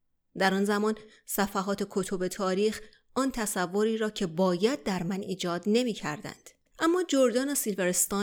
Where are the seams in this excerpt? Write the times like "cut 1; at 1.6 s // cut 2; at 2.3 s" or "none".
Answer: cut 1; at 6.7 s